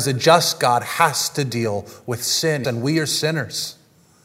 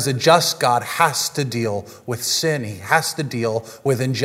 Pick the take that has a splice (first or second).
first